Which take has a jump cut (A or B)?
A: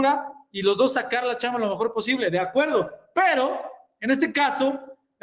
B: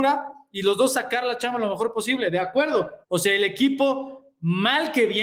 B